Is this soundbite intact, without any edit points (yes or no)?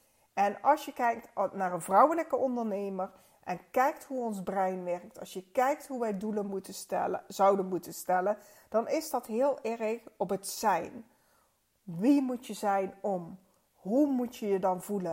yes